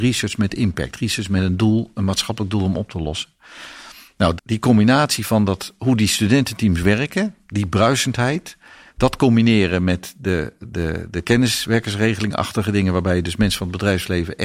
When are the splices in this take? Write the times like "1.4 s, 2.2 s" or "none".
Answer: 4.4 s